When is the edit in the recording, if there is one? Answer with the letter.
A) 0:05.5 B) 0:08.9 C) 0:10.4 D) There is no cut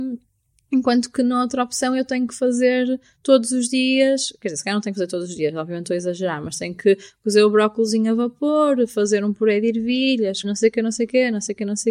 C